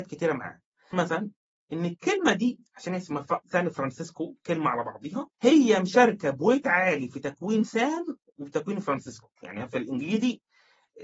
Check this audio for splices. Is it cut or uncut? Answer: cut